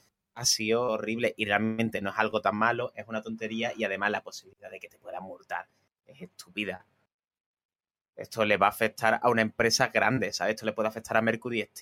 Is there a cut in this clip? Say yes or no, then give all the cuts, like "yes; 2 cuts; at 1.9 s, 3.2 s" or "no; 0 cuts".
no; 0 cuts